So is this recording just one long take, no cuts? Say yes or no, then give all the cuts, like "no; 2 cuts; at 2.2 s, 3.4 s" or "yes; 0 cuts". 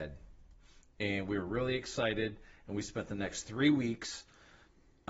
yes; 0 cuts